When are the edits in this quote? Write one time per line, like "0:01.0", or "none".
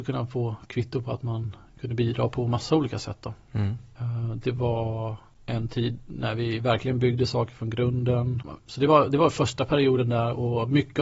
0:03.9
0:08.6